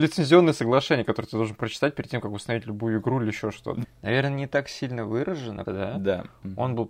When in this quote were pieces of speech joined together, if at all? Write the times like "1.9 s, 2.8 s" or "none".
3.8 s, 5.7 s